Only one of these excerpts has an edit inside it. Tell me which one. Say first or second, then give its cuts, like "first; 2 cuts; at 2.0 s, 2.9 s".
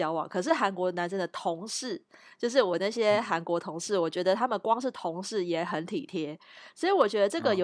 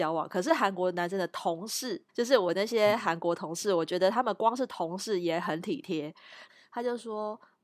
second; 2 cuts; at 2.1 s, 6.5 s